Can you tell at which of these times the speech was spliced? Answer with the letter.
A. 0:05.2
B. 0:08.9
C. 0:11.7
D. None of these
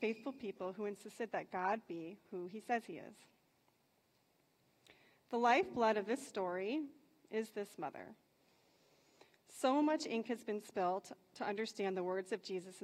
D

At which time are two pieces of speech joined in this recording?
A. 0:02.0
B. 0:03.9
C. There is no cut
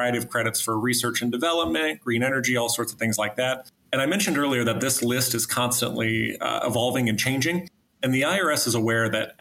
B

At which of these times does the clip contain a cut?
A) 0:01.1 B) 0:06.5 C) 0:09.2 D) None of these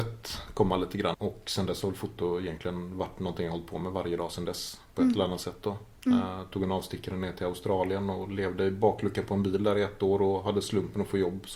A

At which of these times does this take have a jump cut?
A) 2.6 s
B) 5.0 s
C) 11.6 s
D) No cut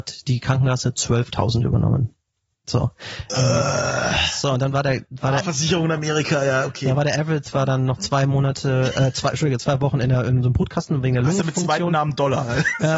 D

